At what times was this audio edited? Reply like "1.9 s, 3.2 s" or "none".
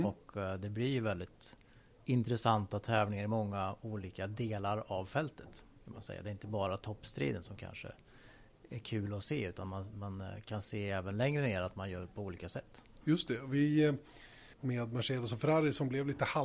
14.5 s